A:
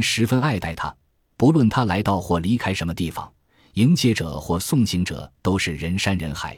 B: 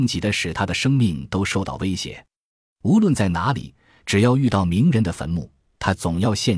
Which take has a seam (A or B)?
B